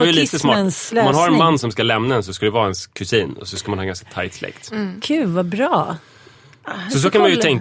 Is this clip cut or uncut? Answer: uncut